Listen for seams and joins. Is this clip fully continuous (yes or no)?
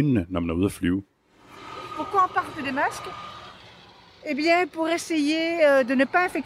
yes